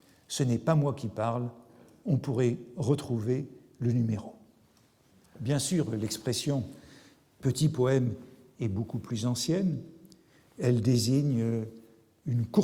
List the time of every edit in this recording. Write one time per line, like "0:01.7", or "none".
none